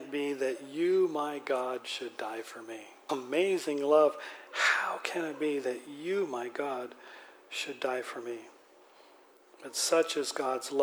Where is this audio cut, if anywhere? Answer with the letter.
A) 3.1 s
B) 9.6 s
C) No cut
A